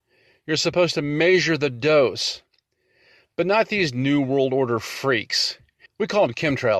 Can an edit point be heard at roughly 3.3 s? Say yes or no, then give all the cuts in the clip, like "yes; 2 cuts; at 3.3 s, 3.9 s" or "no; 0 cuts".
no; 1 cut; at 5.9 s